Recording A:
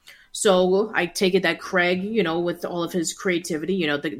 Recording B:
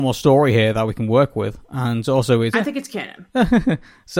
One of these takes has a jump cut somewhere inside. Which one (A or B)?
B